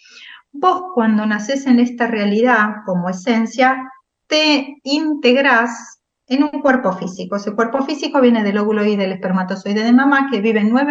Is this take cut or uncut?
uncut